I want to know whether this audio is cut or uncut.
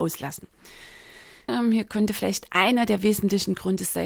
cut